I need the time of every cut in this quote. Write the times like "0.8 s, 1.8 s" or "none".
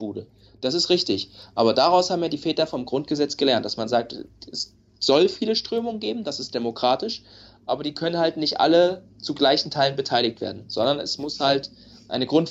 none

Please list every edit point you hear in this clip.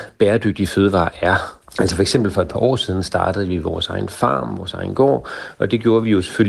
1.6 s

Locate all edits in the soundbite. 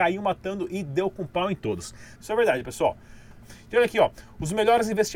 2.1 s, 3.4 s

